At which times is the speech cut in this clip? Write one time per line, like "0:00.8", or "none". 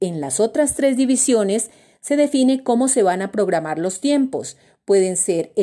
none

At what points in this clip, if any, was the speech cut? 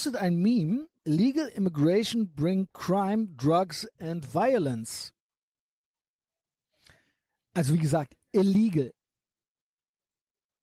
0:01.0

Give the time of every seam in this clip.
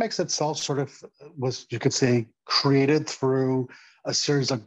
none

